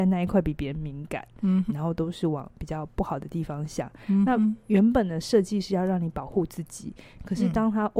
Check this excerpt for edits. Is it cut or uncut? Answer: cut